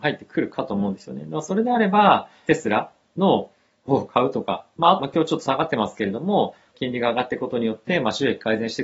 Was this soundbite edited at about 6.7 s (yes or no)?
yes